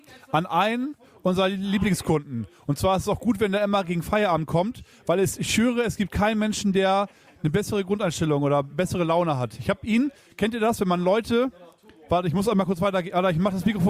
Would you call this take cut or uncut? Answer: uncut